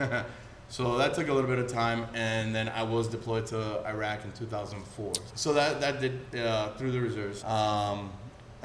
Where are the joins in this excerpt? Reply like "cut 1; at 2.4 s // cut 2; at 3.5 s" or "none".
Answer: cut 1; at 5.3 s // cut 2; at 7.4 s

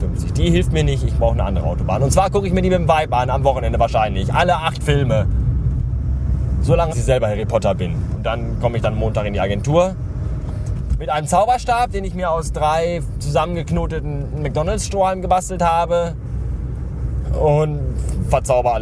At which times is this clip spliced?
cut 1; at 6.9 s

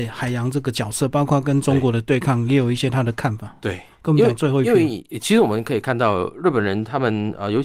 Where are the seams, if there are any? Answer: none

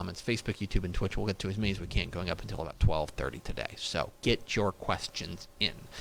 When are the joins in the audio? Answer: none

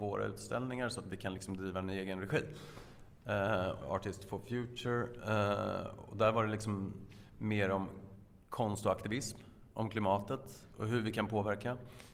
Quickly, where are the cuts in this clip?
cut 1; at 3.8 s

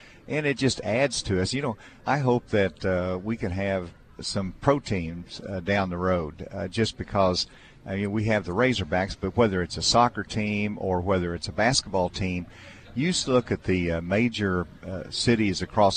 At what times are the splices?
cut 1; at 2.0 s

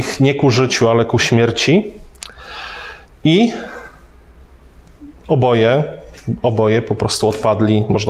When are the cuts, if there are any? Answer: none

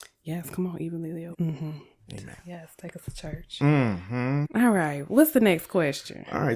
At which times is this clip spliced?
cut 1; at 1.3 s // cut 2; at 4.4 s

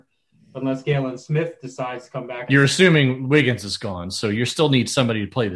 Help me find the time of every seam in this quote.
cut 1; at 2.5 s

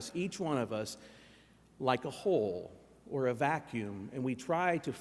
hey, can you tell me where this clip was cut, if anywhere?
none

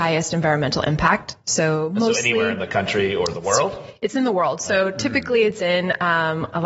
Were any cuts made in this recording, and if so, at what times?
none

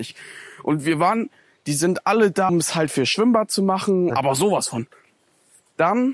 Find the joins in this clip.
cut 1; at 2.5 s // cut 2; at 4.1 s

